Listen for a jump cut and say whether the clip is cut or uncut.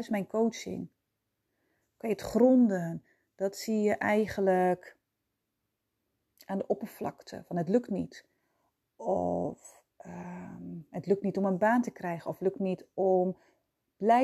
uncut